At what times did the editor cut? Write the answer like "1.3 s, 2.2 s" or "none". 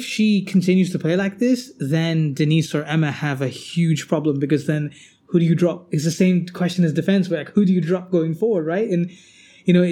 none